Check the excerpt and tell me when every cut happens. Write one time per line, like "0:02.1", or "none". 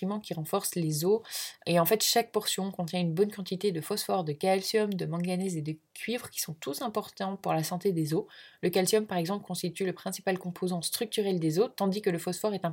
none